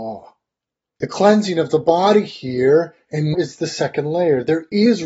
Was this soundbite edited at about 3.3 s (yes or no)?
yes